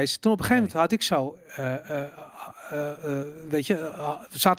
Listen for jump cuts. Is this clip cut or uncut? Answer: uncut